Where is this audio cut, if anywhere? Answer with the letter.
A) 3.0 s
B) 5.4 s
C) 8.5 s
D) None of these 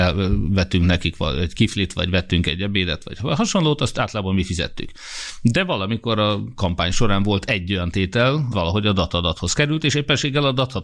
C